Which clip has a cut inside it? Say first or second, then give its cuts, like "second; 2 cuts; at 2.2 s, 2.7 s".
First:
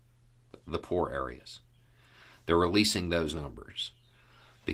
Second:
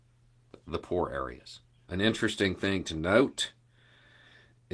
second; 1 cut; at 1.9 s